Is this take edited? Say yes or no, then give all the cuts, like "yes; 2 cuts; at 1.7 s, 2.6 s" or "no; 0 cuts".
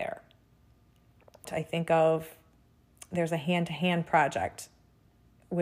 yes; 1 cut; at 1.4 s